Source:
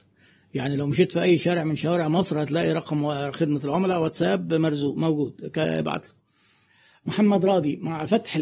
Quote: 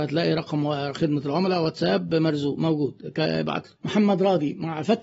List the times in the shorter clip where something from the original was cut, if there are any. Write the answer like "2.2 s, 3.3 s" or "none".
3.8 s